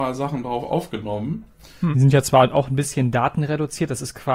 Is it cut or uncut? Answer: cut